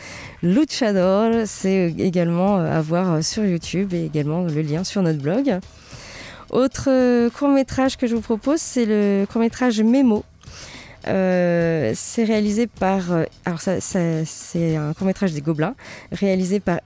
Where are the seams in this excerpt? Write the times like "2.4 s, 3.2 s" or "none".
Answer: none